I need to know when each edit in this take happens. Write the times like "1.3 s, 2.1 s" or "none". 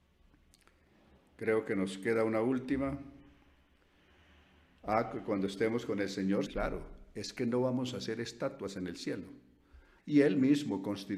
6.5 s, 10.0 s